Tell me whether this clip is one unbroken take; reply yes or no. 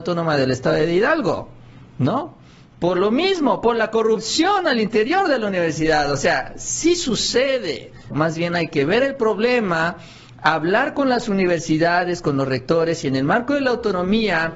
no